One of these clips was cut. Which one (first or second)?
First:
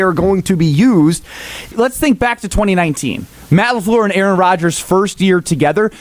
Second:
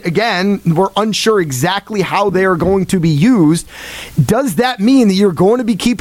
first